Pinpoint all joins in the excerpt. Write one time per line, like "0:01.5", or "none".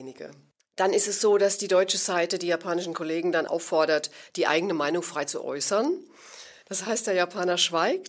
0:03.5
0:06.6